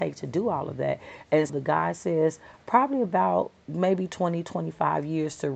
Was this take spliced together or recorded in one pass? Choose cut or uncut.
cut